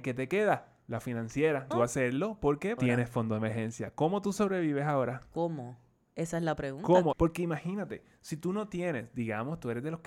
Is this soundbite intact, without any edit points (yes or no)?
no